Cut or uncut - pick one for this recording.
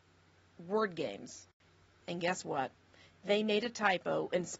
cut